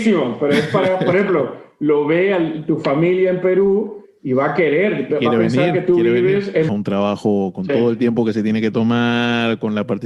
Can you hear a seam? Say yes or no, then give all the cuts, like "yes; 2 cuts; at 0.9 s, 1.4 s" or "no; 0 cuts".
yes; 1 cut; at 6.7 s